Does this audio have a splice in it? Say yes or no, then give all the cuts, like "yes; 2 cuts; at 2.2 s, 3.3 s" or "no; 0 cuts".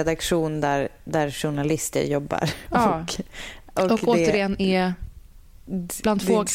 no; 0 cuts